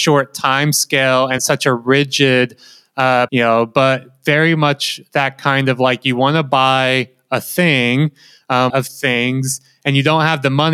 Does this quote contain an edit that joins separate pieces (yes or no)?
yes